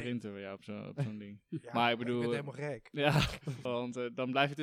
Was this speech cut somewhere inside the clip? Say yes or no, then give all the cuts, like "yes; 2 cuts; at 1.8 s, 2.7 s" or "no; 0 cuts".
yes; 1 cut; at 3.7 s